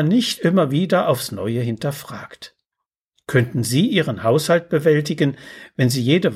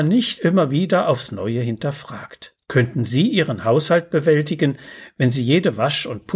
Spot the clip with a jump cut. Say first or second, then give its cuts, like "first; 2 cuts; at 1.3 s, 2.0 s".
second; 1 cut; at 2.6 s